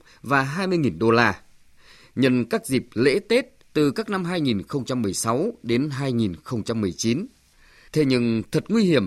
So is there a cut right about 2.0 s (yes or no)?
no